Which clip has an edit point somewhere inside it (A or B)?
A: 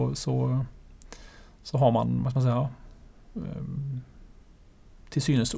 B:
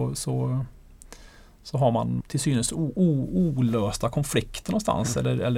B